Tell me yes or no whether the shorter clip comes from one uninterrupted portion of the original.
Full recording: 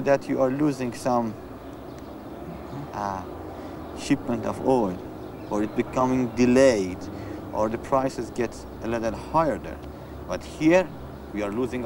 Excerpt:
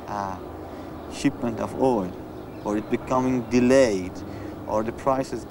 yes